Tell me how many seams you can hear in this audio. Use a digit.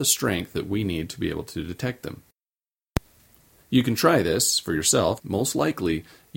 2